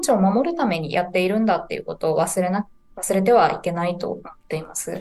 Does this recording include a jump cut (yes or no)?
no